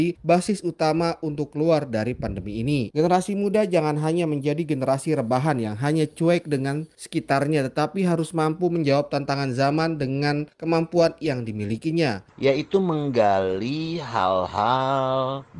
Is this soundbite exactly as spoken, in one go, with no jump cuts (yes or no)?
no